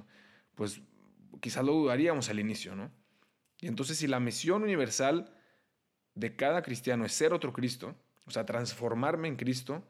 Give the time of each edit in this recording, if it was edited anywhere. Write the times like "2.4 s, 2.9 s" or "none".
none